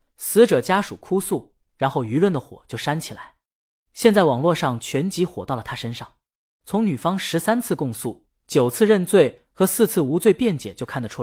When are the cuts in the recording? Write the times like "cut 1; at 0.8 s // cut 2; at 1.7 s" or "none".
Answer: cut 1; at 6.6 s